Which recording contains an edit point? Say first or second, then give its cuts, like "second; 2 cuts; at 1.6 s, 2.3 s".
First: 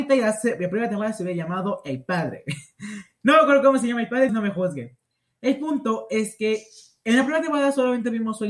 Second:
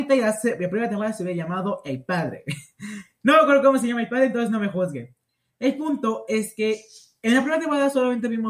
first; 1 cut; at 4.3 s